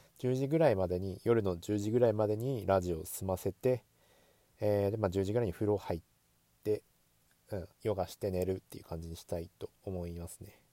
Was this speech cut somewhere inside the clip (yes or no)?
yes